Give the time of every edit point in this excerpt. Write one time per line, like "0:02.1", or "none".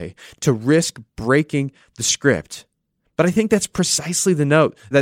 none

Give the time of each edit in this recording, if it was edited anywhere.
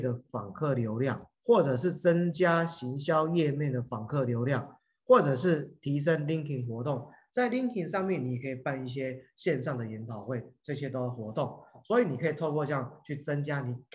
0:01.3

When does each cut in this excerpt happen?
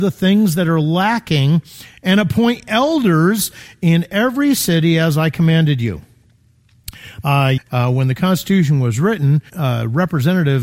0:07.6
0:09.5

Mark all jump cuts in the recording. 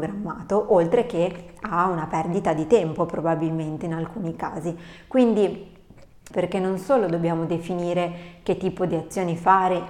0:06.3

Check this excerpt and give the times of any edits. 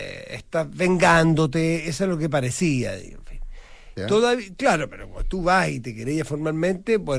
0:04.0

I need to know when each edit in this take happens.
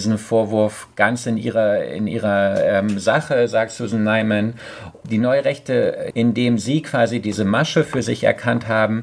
0:05.0
0:06.1

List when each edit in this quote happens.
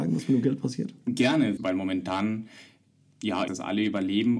0:01.6
0:03.5

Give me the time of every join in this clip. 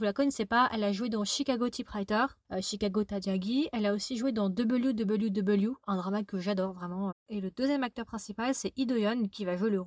0:07.1

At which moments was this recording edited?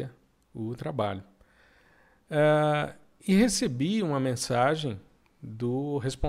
none

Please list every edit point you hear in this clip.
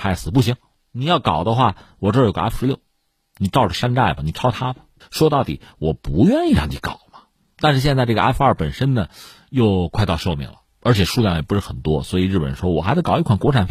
0:05.0

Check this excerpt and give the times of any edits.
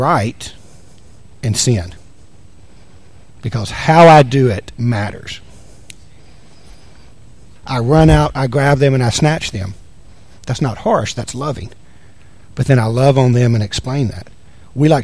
0:07.6

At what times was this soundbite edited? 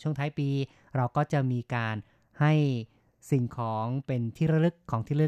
none

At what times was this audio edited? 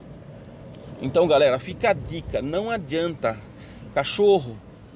none

